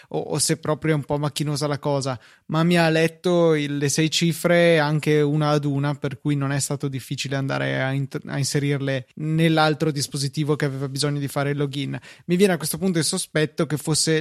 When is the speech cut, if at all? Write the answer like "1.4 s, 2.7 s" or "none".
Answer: 9.1 s